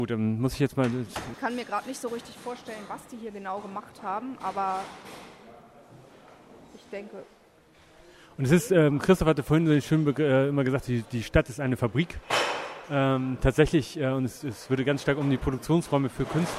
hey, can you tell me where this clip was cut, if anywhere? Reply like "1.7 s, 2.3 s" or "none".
1.3 s